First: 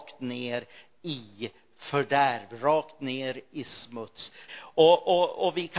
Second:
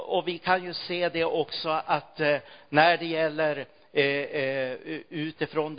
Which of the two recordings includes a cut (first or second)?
first